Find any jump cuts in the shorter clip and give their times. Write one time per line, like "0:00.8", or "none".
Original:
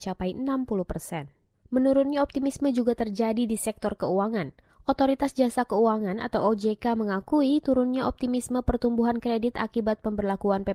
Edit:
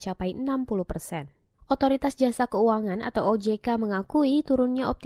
0:01.6